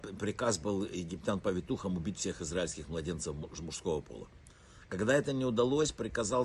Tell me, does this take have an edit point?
no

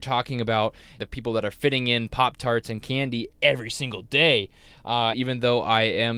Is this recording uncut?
no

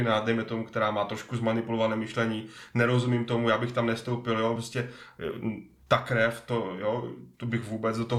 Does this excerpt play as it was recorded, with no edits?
yes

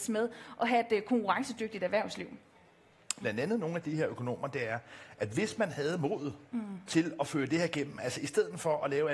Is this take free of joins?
no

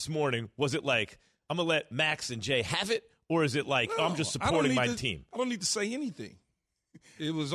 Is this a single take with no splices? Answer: yes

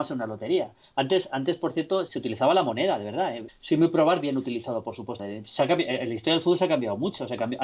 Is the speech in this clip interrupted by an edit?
yes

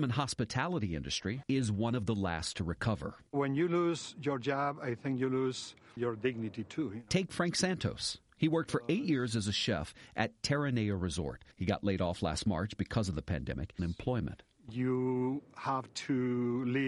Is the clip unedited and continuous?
no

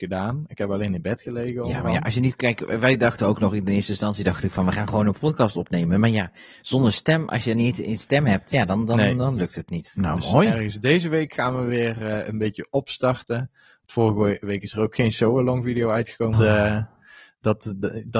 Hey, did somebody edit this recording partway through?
yes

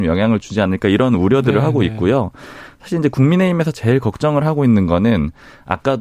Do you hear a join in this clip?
no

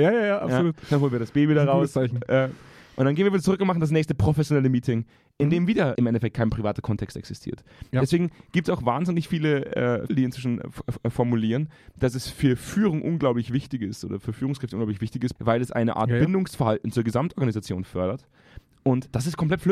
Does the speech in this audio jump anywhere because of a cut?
yes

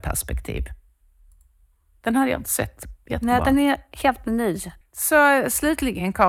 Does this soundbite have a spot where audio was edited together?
yes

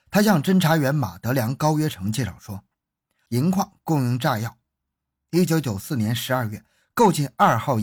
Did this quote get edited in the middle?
yes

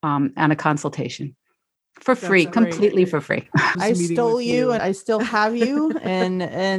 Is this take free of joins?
no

